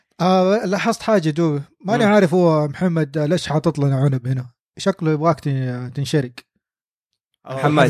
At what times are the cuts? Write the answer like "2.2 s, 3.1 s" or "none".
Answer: none